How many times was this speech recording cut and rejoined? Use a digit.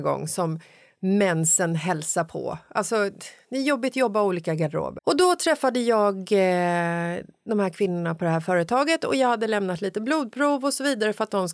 1